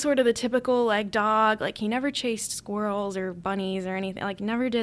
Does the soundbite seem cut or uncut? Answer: uncut